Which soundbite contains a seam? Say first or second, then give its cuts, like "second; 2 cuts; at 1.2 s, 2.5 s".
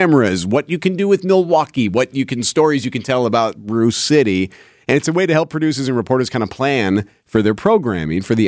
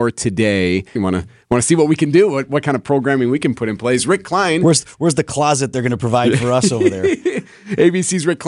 second; 1 cut; at 1.0 s